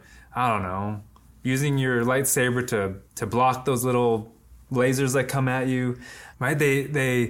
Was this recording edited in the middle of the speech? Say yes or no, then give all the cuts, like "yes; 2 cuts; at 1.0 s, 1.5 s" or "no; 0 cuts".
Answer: yes; 2 cuts; at 3.1 s, 6.3 s